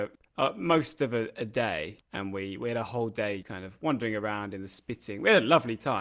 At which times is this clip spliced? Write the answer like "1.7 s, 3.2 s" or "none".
2.0 s, 3.4 s